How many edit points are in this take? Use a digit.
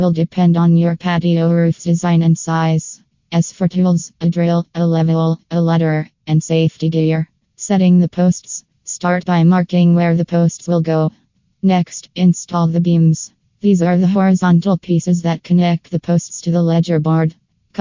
2